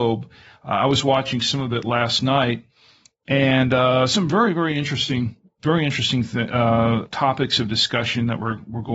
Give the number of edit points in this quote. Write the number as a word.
zero